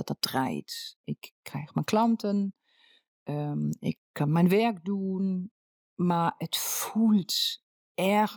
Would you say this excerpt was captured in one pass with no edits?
yes; 0 cuts

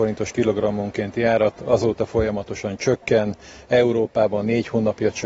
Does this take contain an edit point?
no; 0 cuts

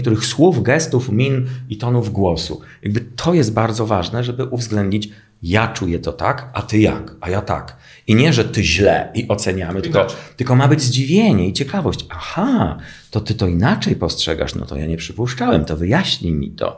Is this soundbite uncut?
yes; 0 cuts

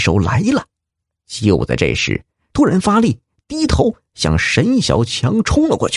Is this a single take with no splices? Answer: no; 2 cuts; at 1.2 s, 2.5 s

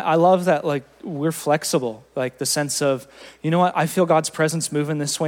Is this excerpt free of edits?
yes; 0 cuts

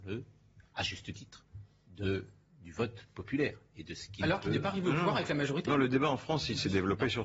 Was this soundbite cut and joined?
no; 0 cuts

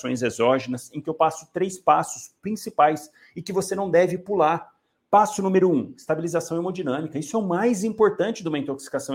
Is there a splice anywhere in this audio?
no; 0 cuts

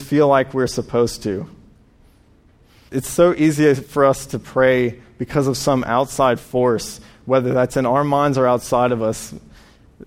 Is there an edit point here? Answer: no; 0 cuts

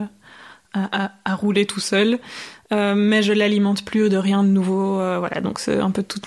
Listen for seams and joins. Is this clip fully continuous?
yes; 0 cuts

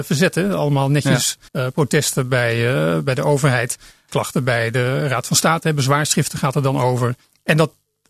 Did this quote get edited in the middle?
yes; 1 cut; at 1.5 s

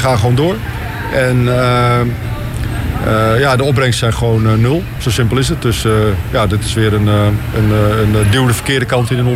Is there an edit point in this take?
no; 0 cuts

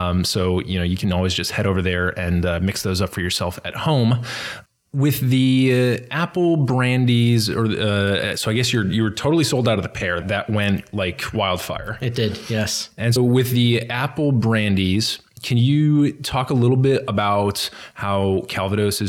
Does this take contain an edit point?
yes; 2 cuts; at 10.2 s, 13.2 s

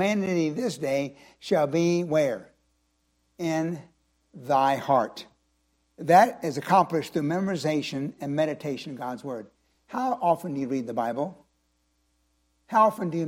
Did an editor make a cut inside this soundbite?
no; 0 cuts

